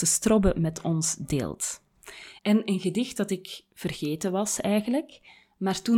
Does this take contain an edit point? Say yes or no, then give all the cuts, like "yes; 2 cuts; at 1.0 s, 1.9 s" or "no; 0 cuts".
yes; 1 cut; at 2.4 s